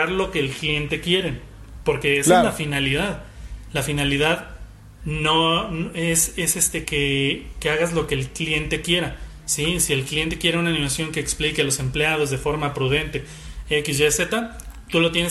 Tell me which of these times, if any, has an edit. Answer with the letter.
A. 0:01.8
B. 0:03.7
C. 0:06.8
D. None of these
C